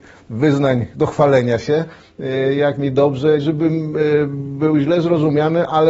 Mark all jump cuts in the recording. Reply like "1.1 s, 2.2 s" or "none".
3.4 s